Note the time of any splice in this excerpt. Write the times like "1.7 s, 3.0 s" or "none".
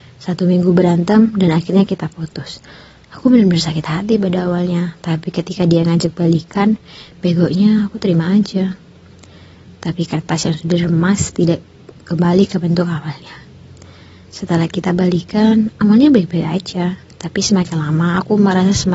none